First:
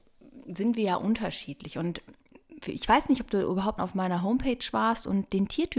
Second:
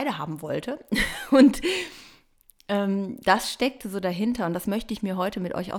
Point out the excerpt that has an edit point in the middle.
first; 1 cut; at 3.8 s

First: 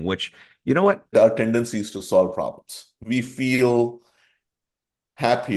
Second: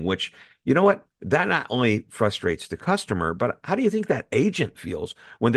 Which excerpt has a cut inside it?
first; 1 cut; at 1.1 s

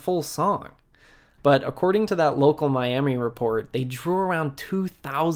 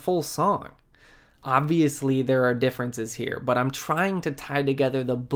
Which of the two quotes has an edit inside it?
first; 1 cut; at 1.4 s

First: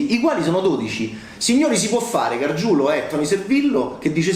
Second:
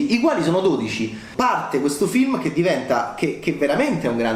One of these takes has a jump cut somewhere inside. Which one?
second; 1 cut; at 1.3 s

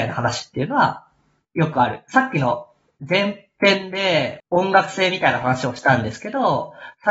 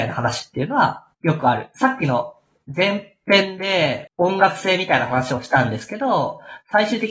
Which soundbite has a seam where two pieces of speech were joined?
second; 1 cut; at 1.1 s

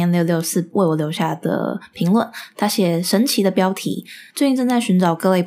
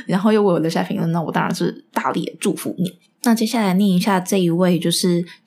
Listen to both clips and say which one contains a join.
first; 1 cut; at 4.3 s

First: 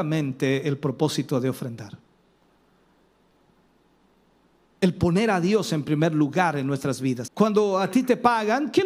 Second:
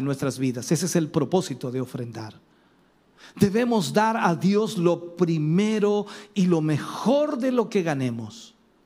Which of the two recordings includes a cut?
first; 1 cut; at 7.3 s

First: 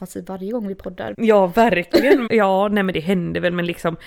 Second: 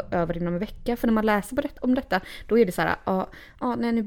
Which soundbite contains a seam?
first; 2 cuts; at 1.1 s, 2.3 s

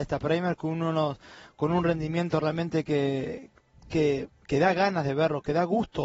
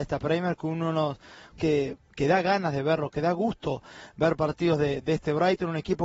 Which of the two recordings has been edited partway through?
second; 1 cut; at 1.5 s

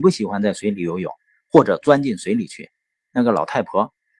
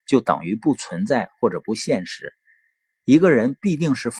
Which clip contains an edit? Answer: first; 1 cut; at 2.9 s

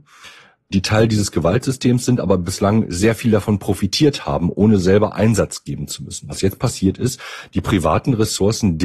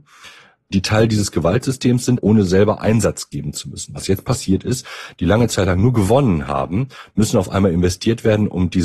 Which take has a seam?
second; 2 cuts; at 2.2 s, 5.1 s

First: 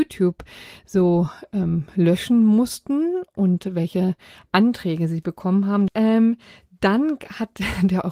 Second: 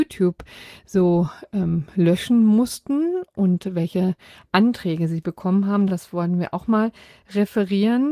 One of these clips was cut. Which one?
first; 1 cut; at 5.9 s

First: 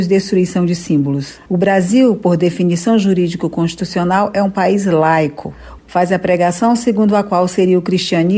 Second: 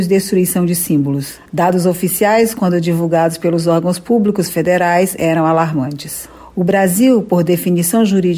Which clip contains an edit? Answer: first; 2 cuts; at 1.5 s, 5.8 s

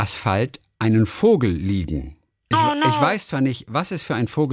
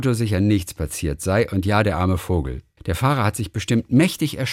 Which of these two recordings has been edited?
second; 1 cut; at 2.8 s

